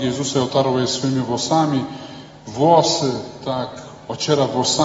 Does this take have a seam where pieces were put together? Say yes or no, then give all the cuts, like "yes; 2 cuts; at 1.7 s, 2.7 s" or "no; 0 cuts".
no; 0 cuts